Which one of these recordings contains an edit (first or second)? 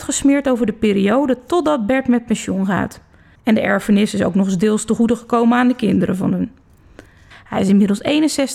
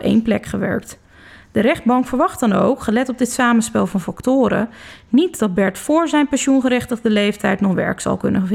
first